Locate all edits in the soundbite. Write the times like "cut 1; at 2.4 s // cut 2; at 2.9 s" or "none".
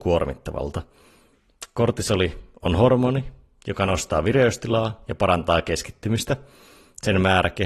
none